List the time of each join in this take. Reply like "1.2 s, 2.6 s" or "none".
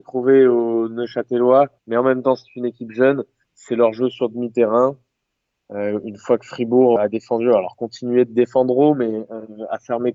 1.8 s, 7.0 s

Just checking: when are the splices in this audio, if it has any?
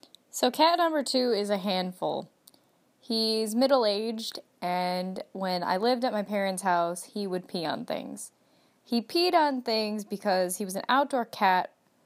none

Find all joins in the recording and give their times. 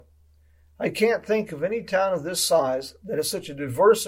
none

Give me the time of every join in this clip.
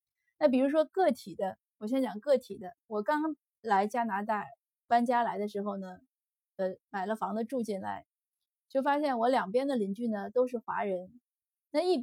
none

